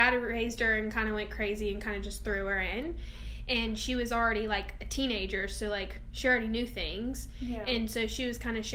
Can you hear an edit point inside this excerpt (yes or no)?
no